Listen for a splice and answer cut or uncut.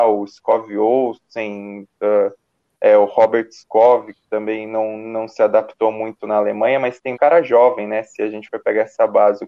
cut